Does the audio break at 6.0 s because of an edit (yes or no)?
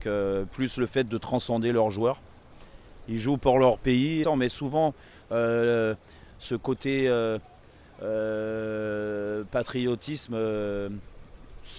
no